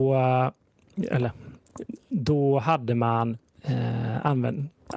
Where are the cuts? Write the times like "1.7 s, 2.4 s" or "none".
none